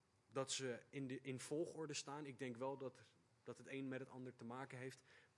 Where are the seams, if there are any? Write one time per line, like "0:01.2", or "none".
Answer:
none